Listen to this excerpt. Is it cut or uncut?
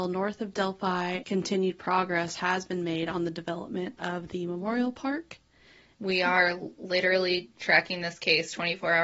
cut